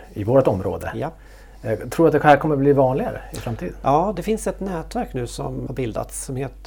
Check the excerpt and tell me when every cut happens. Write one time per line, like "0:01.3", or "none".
0:04.1
0:05.7